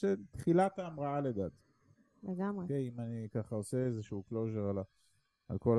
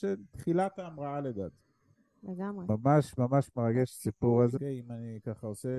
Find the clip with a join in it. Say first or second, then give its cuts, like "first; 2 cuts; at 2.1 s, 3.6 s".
second; 2 cuts; at 2.7 s, 4.6 s